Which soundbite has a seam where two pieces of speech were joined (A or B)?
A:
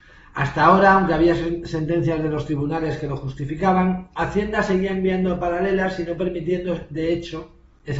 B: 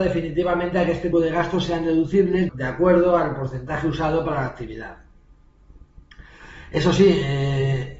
B